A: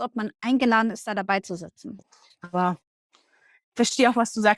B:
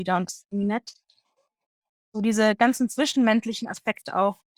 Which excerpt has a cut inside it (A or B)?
A